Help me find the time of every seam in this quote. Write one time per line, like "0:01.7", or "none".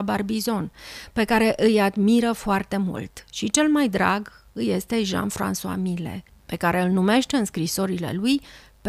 none